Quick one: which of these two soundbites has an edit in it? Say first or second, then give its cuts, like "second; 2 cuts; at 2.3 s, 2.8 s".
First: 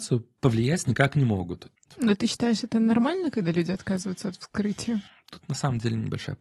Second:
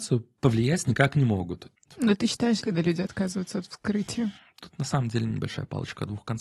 second; 1 cut; at 2.6 s